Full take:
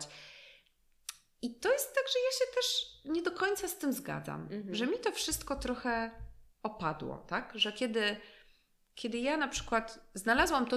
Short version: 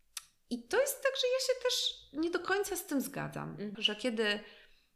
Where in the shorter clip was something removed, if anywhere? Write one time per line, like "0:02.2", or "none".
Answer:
0:03.7